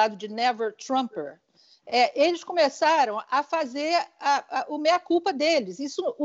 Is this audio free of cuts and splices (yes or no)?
yes